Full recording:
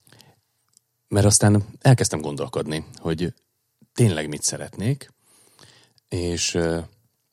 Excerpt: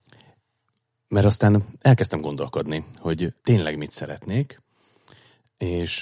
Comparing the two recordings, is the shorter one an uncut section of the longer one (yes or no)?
no